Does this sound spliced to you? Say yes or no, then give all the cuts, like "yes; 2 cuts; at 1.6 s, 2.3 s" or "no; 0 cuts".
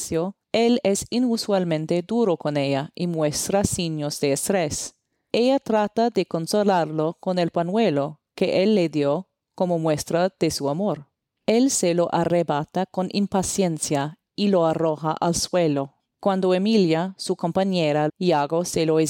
yes; 1 cut; at 18.1 s